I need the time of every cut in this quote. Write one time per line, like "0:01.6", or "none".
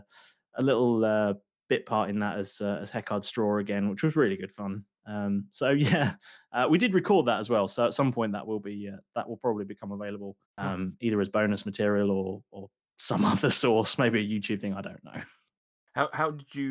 0:10.5